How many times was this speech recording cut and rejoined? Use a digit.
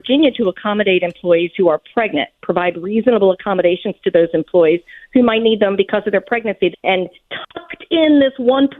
1